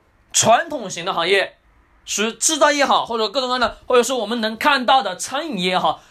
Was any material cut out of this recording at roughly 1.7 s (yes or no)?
no